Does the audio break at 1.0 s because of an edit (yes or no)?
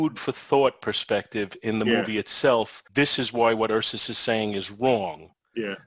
no